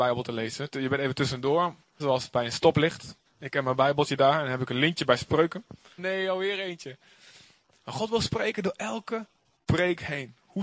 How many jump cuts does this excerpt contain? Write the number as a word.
three